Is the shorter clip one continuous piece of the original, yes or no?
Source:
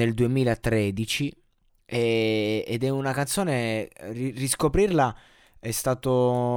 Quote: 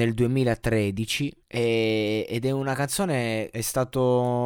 no